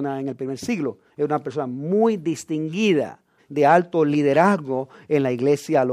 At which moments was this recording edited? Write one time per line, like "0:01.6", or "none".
0:03.4